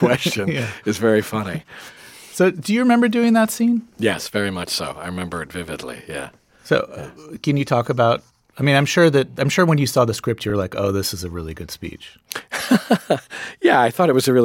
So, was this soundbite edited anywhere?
no; 0 cuts

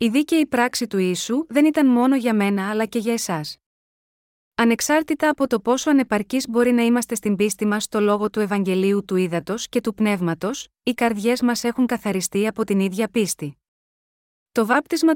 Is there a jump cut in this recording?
no; 0 cuts

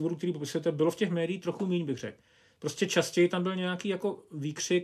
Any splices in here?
no; 0 cuts

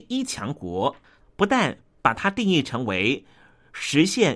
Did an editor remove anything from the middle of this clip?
yes; 1 cut; at 1.2 s

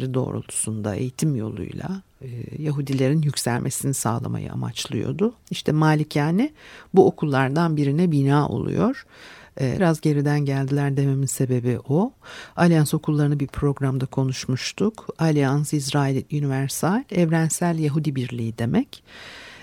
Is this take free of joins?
no; 2 cuts; at 5.4 s, 9.8 s

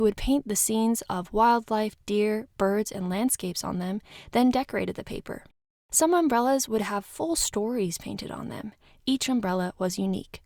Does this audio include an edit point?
no; 0 cuts

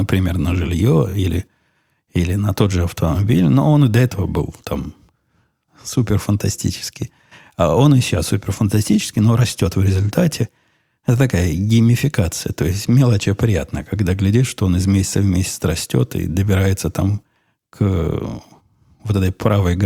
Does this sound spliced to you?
no; 0 cuts

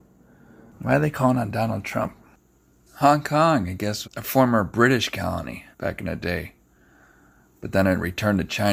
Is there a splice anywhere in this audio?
yes; 2 cuts; at 4.0 s, 5.7 s

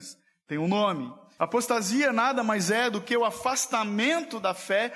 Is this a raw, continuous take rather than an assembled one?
no; 1 cut; at 1.4 s

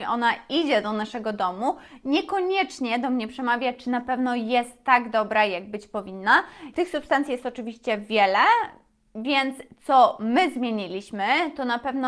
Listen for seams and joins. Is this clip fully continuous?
no; 1 cut; at 6.7 s

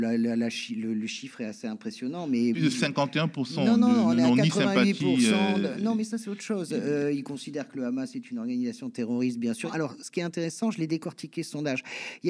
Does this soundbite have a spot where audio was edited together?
yes; 1 cut; at 2.5 s

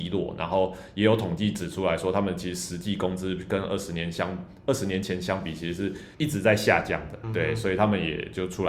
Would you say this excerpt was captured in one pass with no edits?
no; 2 cuts; at 6.1 s, 7.2 s

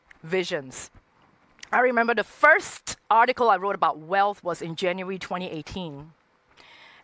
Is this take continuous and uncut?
yes; 0 cuts

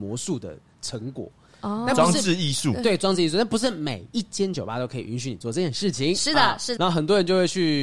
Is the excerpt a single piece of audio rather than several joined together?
no; 1 cut; at 6.8 s

